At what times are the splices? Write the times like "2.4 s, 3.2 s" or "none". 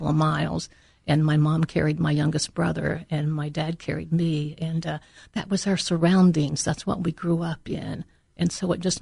none